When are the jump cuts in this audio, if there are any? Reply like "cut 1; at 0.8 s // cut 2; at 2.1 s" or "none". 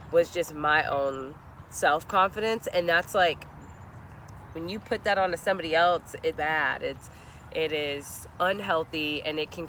cut 1; at 6.4 s